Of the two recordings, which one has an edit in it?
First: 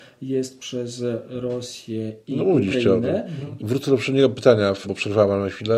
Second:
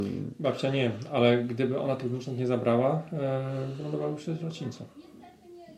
first; 2 cuts; at 3.6 s, 4.8 s

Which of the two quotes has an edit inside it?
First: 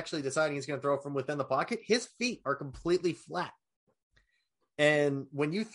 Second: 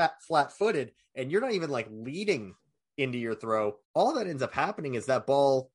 second; 1 cut; at 3.8 s

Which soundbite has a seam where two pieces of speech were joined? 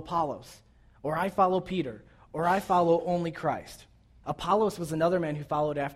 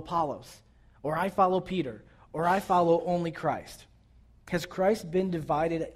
first; 1 cut; at 4.2 s

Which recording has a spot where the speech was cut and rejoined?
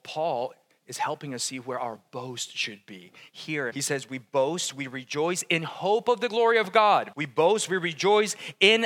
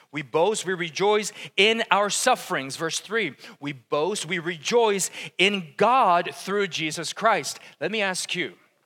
first; 2 cuts; at 3.7 s, 7.1 s

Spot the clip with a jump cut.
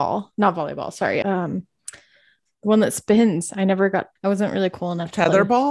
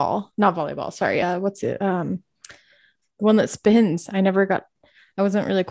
first; 2 cuts; at 1.2 s, 4.2 s

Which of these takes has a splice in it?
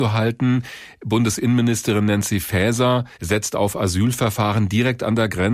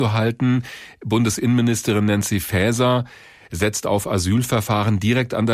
first; 1 cut; at 3.1 s

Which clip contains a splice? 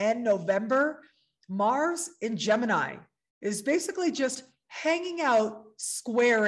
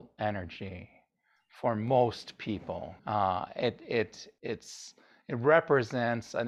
second; 2 cuts; at 3.0 s, 4.4 s

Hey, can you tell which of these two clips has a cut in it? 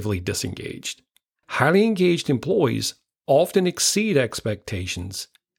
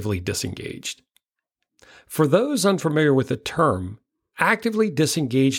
first; 1 cut; at 1.4 s

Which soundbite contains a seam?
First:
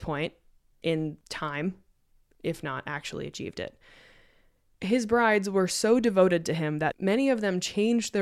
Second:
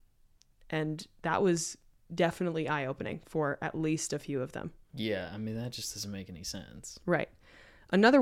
first; 1 cut; at 2.3 s

